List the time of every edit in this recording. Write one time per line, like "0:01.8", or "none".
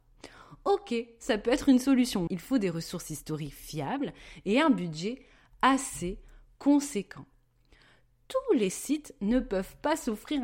0:02.3